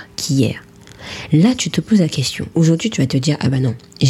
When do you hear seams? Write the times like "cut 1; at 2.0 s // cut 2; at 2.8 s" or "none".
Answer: cut 1; at 2.5 s